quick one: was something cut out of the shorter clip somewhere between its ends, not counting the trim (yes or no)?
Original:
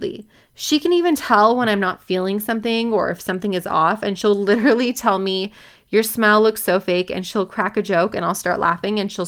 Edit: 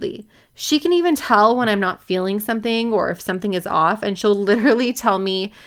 no